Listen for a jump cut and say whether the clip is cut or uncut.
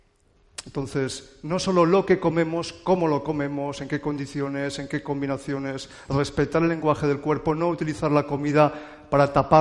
uncut